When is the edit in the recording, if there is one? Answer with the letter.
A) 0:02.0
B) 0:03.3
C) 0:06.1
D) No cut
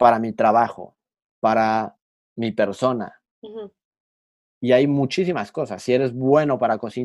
B